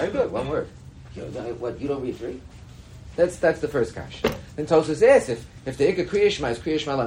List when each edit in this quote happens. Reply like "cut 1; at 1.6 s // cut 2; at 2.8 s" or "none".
cut 1; at 1.1 s // cut 2; at 3.1 s

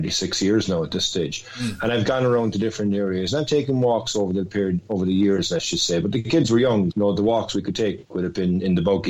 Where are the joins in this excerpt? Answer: cut 1; at 6.9 s

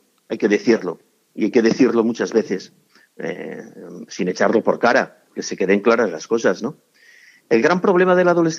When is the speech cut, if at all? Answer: cut 1; at 5.3 s

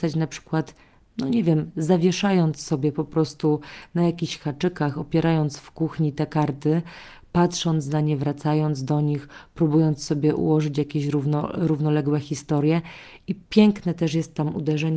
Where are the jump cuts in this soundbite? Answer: none

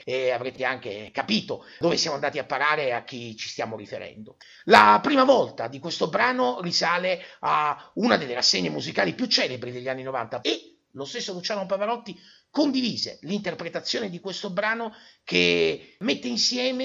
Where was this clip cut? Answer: cut 1; at 10.4 s

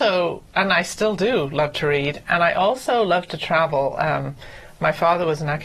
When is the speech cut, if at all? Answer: none

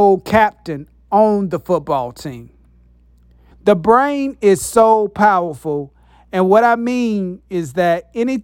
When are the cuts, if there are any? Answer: cut 1; at 3.5 s

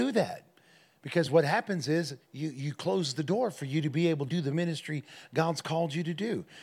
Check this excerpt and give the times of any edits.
cut 1; at 4.3 s

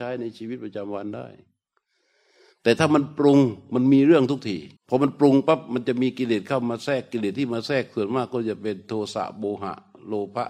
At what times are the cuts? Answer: cut 1; at 4.8 s

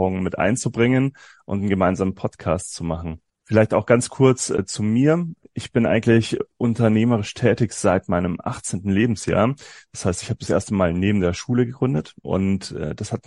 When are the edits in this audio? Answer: none

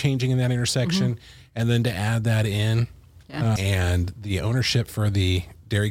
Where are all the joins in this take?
cut 1; at 3.6 s

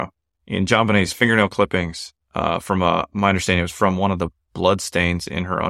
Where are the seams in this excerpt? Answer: none

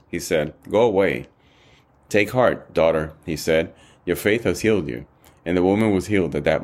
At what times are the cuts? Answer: cut 1; at 1.9 s

